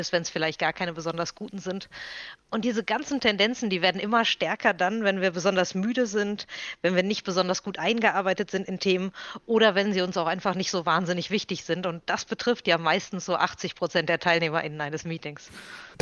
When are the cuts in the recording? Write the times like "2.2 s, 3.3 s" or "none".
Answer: none